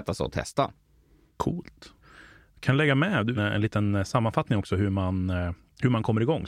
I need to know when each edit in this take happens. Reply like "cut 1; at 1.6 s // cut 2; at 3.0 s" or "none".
cut 1; at 3.4 s